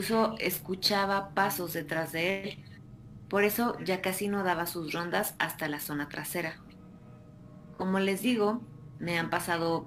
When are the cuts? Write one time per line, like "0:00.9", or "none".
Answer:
none